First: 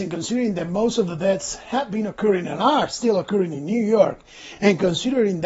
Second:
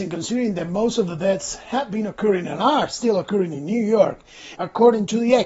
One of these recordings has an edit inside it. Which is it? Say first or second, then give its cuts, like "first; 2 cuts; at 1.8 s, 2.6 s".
second; 1 cut; at 4.5 s